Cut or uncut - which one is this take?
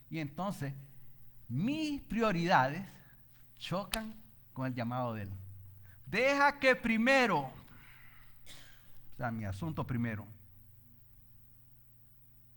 cut